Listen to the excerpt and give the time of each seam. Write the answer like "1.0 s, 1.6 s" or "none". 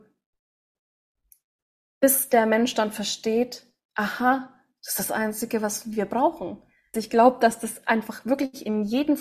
6.9 s